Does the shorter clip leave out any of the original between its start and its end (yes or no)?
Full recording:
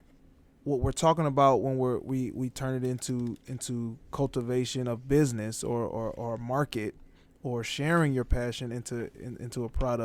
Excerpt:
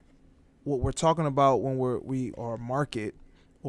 yes